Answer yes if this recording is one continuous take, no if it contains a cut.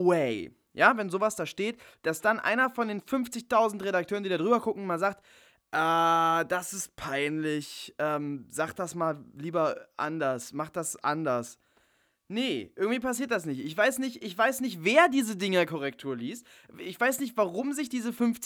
yes